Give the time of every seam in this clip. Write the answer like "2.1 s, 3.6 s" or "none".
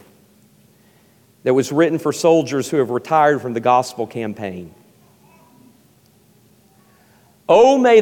none

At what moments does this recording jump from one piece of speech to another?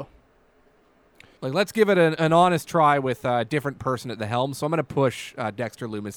1.4 s

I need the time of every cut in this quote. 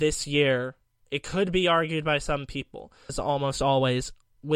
3.1 s

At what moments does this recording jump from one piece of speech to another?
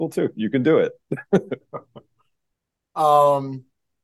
1.6 s

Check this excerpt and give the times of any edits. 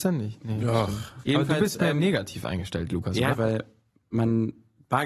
1.2 s, 3.3 s

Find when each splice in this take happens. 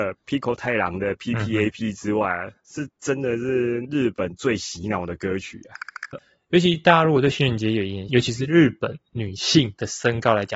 6.1 s, 8.1 s

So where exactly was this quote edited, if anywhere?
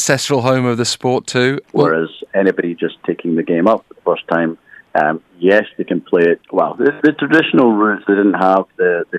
1.6 s, 6.4 s, 8.0 s

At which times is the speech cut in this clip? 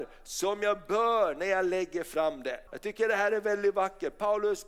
2.7 s

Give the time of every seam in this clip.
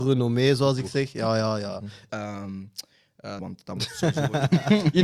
2.1 s, 3.4 s

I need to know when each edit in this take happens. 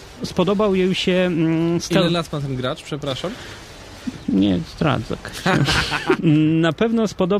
6.2 s

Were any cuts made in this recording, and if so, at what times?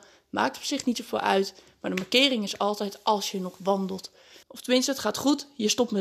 4.4 s

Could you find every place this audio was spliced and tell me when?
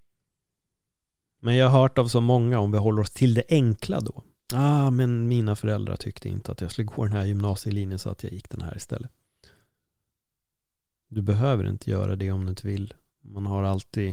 none

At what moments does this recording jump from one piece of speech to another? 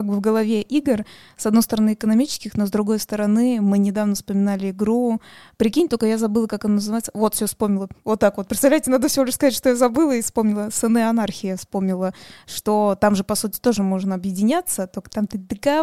none

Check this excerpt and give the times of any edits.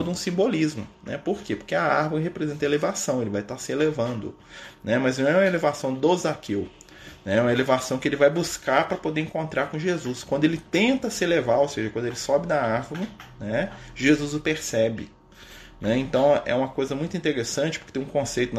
none

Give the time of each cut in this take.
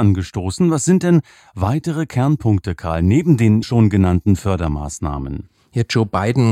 3.6 s

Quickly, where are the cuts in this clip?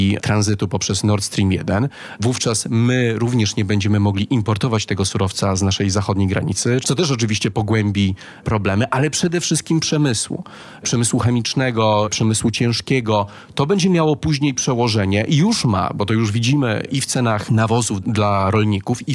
6.8 s

